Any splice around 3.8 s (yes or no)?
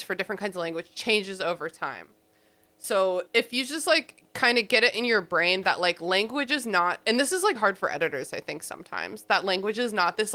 no